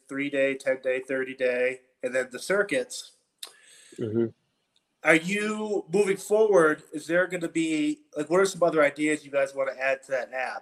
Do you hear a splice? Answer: no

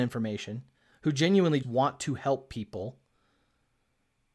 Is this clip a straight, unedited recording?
no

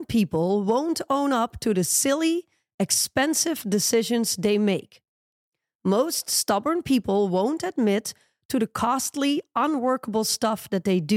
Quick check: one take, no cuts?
yes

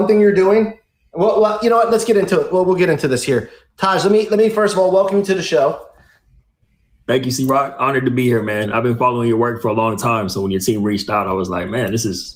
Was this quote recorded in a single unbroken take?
yes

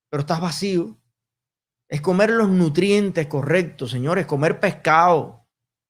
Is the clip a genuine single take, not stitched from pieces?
yes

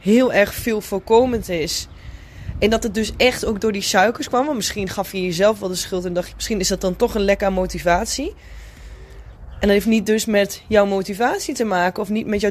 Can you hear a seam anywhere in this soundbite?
yes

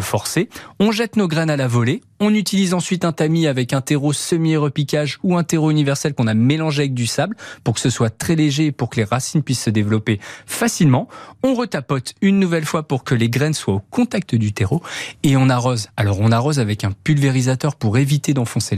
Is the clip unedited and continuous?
yes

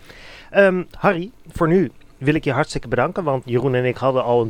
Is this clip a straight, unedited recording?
no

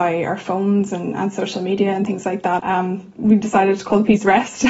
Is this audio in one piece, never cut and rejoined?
no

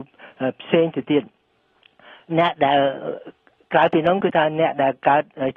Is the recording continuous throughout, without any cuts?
yes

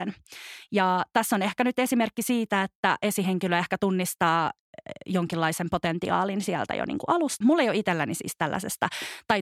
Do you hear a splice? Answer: yes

